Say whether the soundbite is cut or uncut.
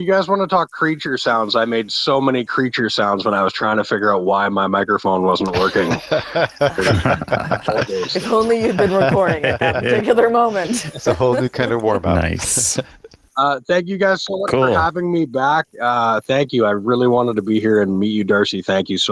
uncut